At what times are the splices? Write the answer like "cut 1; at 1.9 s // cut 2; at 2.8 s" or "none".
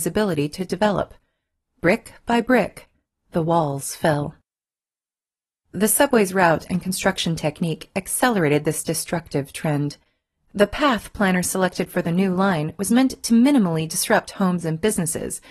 none